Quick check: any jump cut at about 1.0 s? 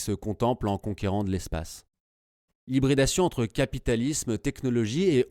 no; 1 cut; at 2.5 s

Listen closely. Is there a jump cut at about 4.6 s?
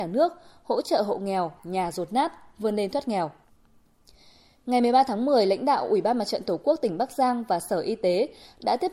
no; 1 cut; at 1.6 s

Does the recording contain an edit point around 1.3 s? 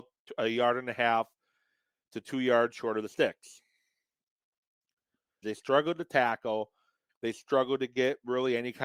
no; 2 cuts; at 5.4 s, 7.1 s

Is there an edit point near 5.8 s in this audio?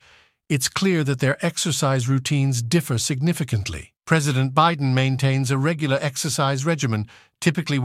no; 1 cut; at 4.0 s

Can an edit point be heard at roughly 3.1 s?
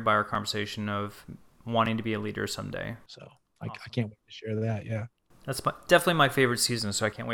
yes; 1 cut; at 3.1 s

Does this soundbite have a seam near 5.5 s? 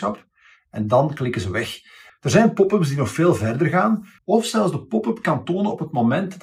no; 2 cuts; at 2.1 s, 4.2 s

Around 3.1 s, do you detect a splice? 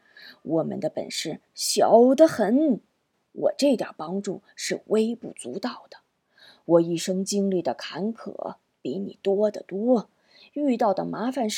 no; 0 cuts

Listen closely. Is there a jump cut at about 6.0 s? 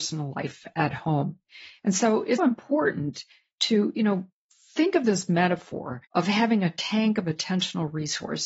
yes; 2 cuts; at 2.4 s, 6.0 s

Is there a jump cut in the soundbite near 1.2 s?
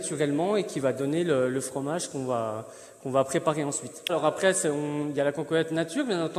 no; 1 cut; at 4.1 s

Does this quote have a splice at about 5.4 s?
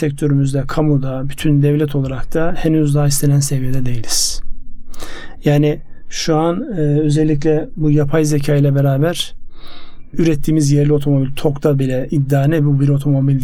no; 0 cuts

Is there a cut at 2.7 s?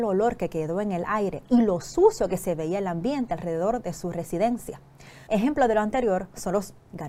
no; 1 cut; at 5.3 s

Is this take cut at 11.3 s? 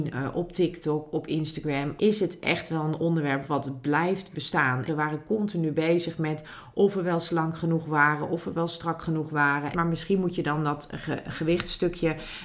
no; 3 cuts; at 2.0 s, 4.9 s, 9.7 s

